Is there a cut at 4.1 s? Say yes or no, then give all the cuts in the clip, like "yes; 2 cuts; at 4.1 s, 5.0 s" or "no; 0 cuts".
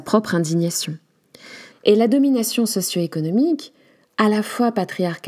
no; 1 cut; at 1.7 s